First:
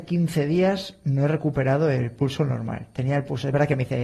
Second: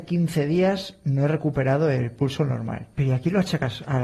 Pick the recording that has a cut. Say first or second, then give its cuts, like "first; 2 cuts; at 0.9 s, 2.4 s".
second; 1 cut; at 2.9 s